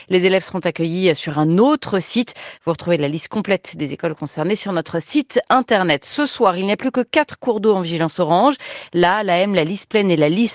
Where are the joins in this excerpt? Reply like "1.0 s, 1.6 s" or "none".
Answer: none